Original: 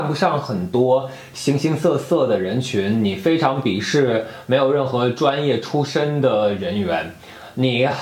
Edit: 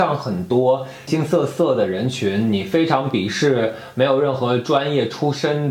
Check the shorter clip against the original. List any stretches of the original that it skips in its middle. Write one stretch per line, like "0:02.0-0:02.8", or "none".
0:01.3-0:01.6